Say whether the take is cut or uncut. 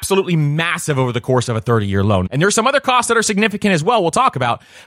cut